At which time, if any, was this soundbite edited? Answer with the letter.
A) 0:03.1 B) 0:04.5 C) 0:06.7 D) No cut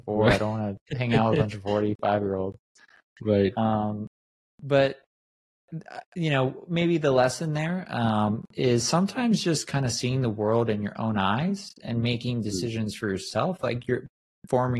D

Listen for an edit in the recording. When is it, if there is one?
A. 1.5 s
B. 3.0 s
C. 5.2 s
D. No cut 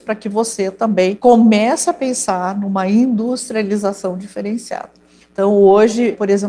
C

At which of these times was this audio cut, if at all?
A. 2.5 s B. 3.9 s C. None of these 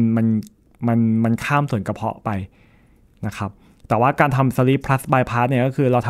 C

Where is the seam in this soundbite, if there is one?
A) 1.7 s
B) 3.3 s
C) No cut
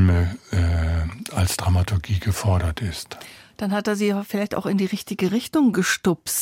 C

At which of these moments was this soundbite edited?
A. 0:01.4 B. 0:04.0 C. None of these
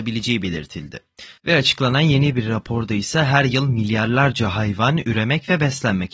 A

